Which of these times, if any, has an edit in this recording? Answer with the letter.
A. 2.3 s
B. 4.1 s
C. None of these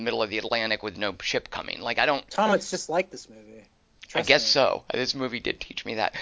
C